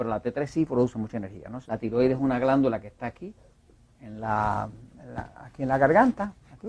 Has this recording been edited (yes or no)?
yes